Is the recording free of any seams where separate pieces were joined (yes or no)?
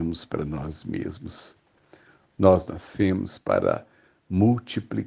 yes